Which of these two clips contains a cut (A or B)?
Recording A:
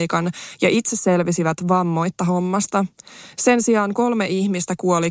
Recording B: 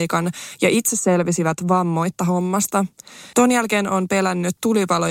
B